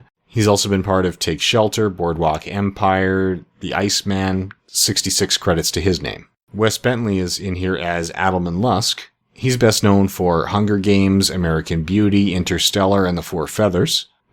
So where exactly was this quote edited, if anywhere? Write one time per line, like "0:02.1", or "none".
none

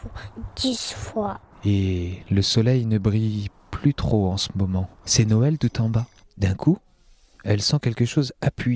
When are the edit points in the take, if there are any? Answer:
0:01.5
0:05.0
0:06.2

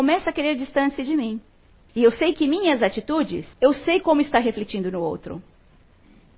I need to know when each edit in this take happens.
0:01.9
0:03.5

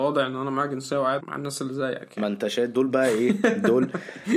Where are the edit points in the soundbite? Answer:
0:01.2

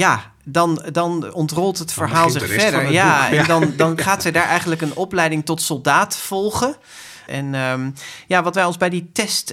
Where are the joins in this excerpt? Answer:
0:07.3

